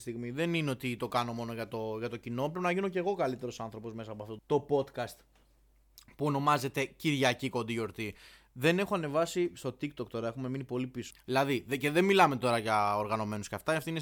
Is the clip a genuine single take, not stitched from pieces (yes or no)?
no